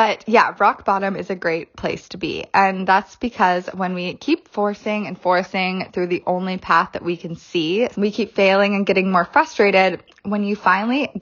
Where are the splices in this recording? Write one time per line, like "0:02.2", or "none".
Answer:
0:07.9